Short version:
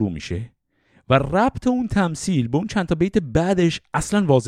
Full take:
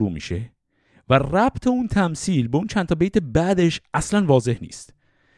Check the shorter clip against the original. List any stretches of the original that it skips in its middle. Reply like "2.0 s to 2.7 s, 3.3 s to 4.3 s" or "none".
none